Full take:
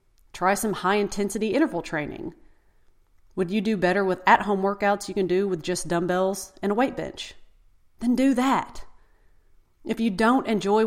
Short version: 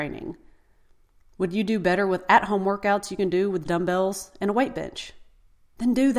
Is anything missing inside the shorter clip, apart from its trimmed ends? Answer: yes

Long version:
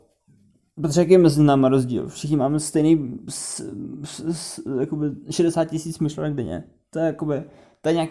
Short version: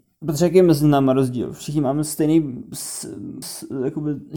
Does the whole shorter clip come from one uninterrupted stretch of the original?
no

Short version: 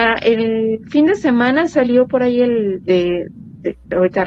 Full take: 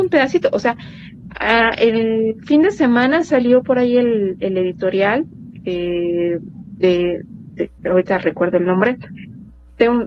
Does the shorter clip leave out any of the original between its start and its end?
yes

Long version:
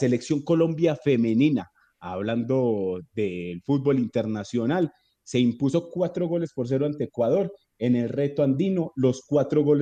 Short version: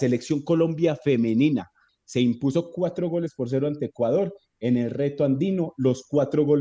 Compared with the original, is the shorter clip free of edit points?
no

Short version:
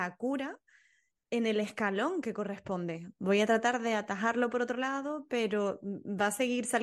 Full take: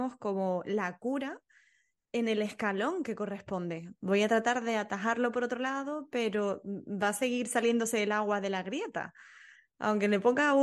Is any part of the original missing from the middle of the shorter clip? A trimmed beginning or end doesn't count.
no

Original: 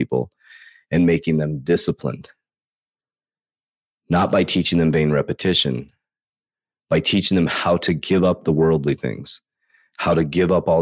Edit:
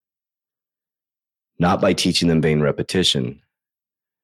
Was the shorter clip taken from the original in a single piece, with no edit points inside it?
yes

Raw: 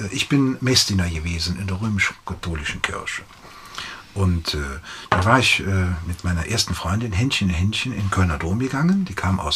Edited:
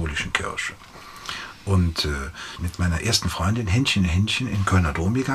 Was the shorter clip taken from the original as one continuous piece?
no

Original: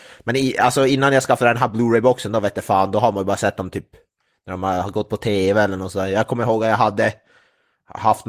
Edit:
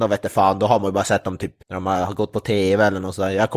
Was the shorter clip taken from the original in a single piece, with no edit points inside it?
no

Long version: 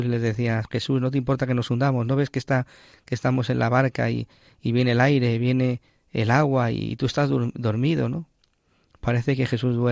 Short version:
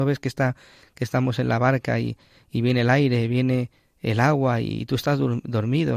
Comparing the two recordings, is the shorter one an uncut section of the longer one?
yes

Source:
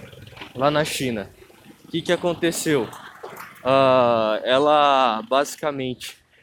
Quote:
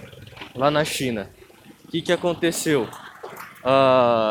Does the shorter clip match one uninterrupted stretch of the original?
yes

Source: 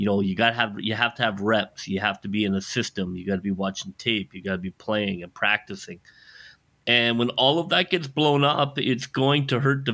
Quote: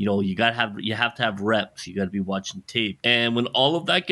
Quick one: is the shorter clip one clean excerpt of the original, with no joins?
no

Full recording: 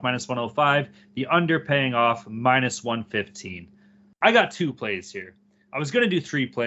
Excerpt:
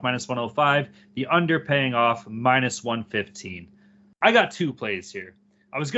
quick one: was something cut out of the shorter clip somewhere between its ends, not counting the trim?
no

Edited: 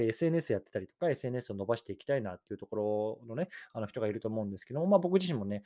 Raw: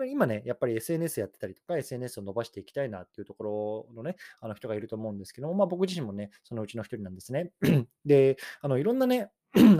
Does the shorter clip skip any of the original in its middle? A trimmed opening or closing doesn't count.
no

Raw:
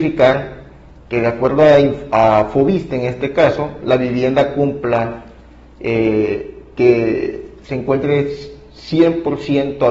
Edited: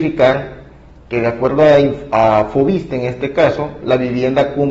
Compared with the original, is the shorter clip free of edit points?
yes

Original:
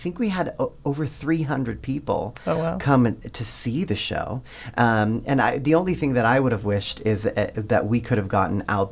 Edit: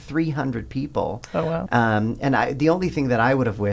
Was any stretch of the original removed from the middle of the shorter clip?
yes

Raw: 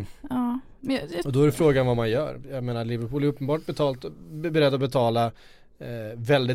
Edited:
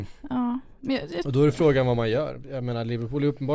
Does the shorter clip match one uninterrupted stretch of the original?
yes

